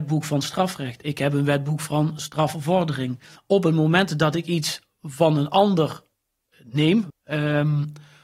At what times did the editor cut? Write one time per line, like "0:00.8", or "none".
0:03.3
0:07.1